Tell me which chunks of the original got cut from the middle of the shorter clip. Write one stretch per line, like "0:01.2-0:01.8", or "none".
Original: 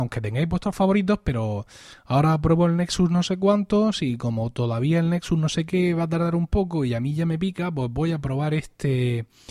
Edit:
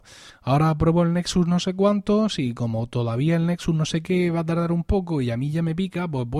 none